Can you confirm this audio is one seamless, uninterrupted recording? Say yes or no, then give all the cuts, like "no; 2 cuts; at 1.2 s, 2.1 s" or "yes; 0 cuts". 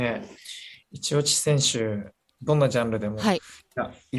no; 1 cut; at 2.3 s